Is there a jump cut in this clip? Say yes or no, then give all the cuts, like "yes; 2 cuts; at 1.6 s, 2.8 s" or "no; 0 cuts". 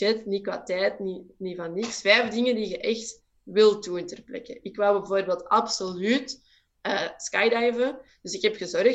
no; 0 cuts